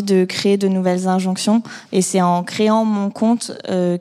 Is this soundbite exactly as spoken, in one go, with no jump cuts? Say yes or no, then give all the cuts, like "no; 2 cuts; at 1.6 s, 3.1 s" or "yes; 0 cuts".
no; 1 cut; at 1.8 s